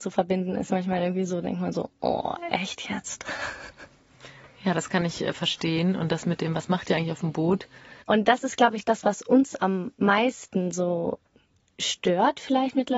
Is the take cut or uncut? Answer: cut